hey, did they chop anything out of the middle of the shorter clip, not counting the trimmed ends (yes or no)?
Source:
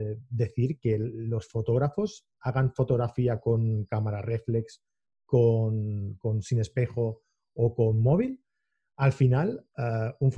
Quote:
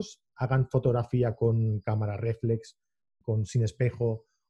yes